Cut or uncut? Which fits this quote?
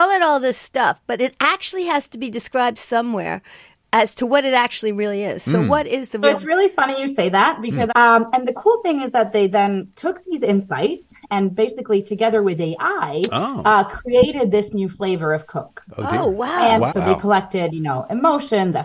cut